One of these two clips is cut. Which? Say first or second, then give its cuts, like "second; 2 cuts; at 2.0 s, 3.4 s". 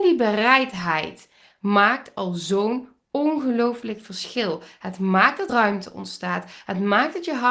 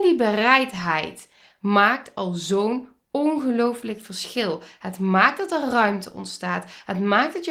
first; 1 cut; at 5.5 s